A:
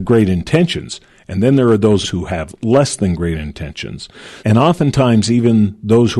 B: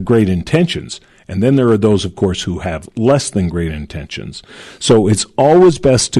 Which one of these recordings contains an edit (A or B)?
A